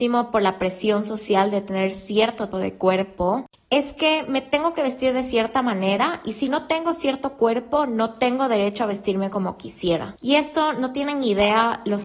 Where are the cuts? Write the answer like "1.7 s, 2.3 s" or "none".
2.5 s